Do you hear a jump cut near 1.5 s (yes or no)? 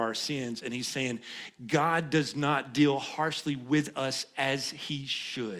yes